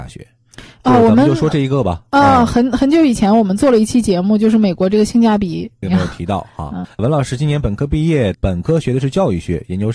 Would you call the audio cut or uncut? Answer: cut